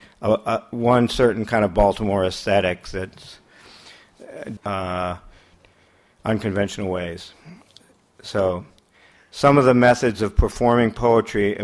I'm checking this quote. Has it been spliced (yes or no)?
yes